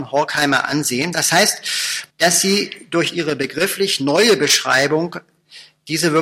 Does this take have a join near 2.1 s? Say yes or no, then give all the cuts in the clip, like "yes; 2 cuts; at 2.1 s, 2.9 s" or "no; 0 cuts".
yes; 1 cut; at 2.1 s